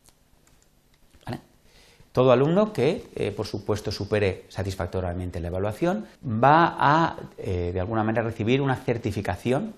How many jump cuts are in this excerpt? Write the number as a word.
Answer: one